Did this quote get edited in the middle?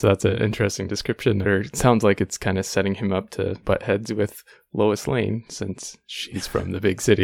yes; 2 cuts; at 1.4 s, 3.6 s

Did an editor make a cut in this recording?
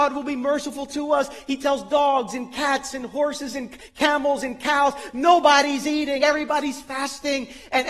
no; 0 cuts

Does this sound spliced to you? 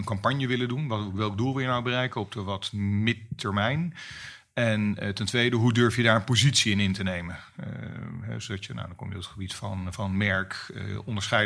no; 0 cuts

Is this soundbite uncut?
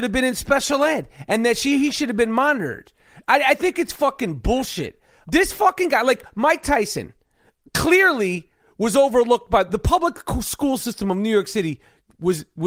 yes; 0 cuts

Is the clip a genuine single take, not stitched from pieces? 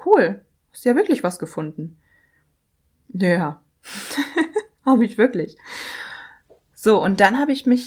yes; 0 cuts

